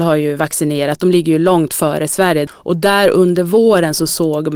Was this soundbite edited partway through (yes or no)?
yes